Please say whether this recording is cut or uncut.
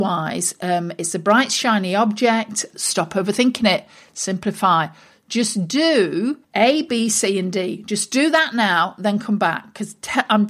cut